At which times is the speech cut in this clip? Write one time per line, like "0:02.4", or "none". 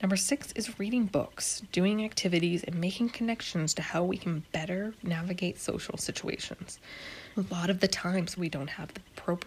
0:07.3
0:08.4